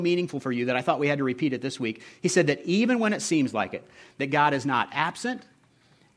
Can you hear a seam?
no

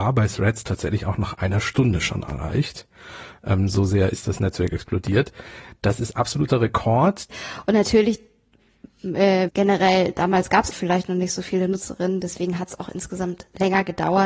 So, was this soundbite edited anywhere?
yes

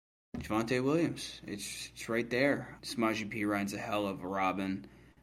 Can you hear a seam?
yes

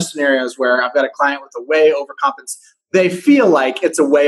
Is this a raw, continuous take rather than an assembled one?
yes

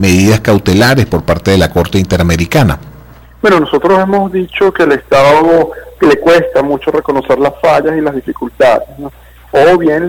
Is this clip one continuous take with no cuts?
yes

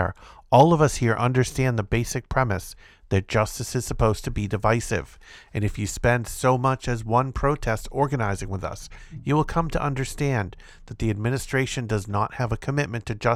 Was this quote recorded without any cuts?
yes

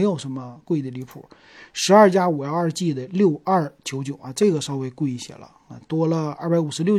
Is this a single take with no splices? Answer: yes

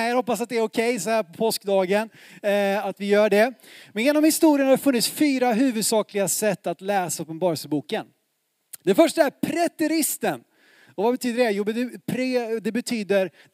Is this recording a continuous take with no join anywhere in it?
yes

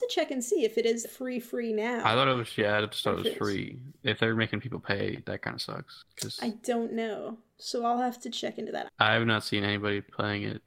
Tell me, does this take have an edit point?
yes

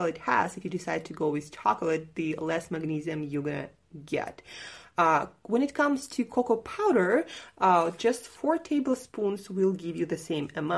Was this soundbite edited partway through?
no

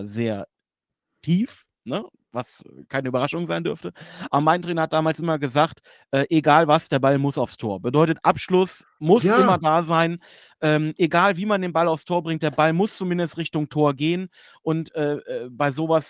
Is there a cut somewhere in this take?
no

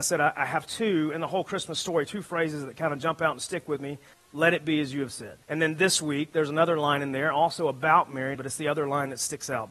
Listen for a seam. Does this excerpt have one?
yes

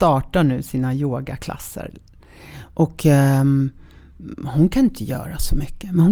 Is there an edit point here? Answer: no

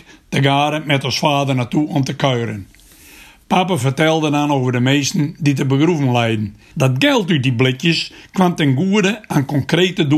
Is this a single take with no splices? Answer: no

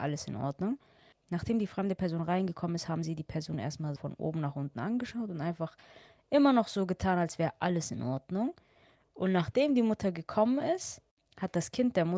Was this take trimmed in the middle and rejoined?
yes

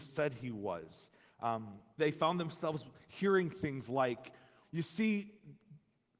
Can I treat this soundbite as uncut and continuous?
no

